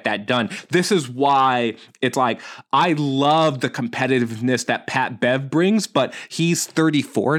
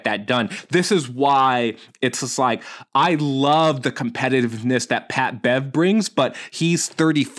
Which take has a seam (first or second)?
first